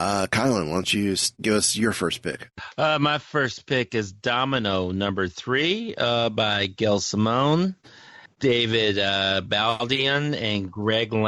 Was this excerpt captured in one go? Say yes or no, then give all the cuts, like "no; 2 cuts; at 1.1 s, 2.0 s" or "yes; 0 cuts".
yes; 0 cuts